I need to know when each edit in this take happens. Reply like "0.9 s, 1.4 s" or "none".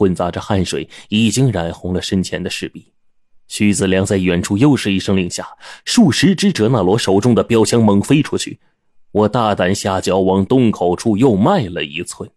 3.3 s